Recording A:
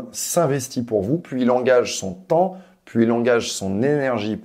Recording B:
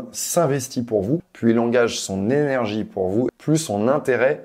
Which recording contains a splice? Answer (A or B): B